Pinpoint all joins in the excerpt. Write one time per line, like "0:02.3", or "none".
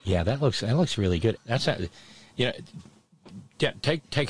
0:01.4